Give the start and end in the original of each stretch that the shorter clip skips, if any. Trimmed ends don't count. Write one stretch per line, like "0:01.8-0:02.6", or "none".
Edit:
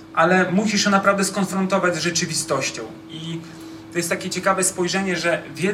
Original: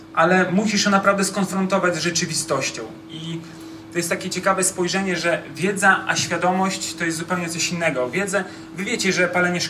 none